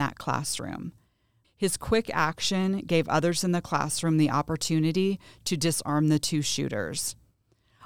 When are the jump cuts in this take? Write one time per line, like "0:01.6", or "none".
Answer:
0:01.4